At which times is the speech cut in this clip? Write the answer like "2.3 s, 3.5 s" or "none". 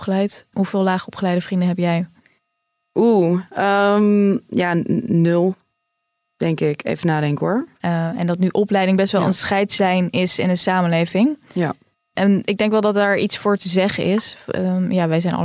7.8 s